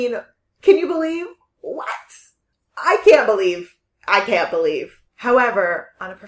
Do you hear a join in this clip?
yes; 1 cut; at 5.1 s

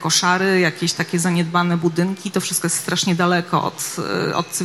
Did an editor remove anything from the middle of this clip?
no; 0 cuts

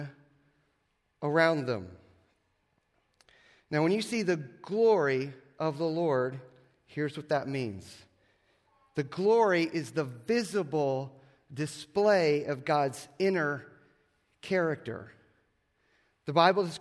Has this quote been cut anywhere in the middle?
no; 0 cuts

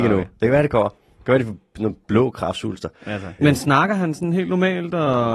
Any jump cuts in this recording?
yes; 1 cut; at 3.4 s

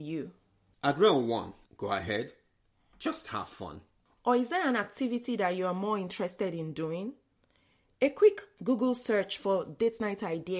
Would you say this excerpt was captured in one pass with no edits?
no; 2 cuts; at 1.6 s, 4.2 s

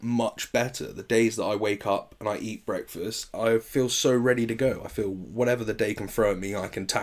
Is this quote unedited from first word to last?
yes; 0 cuts

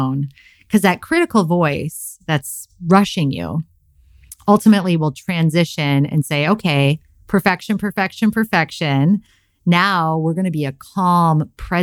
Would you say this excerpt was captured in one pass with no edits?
yes; 0 cuts

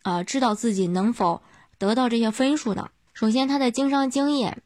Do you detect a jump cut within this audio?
yes; 1 cut; at 3.1 s

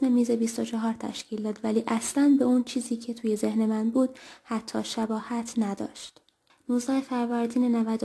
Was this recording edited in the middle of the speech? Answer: yes; 1 cut; at 6.5 s

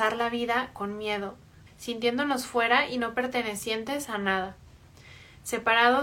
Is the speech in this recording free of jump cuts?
no; 1 cut; at 1.7 s

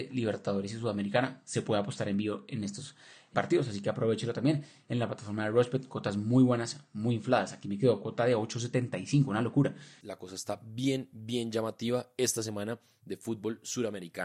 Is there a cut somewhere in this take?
yes; 1 cut; at 10.0 s

